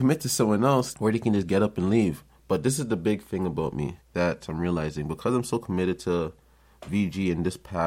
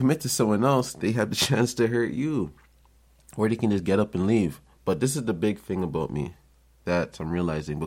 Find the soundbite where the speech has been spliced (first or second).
first